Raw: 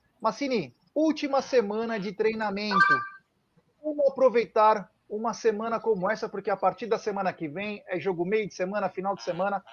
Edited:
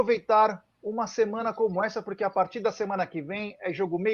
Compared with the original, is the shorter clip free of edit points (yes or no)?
yes